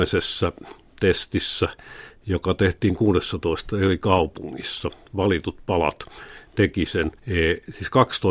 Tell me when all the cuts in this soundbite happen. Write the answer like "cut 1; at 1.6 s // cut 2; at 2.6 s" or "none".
cut 1; at 7.2 s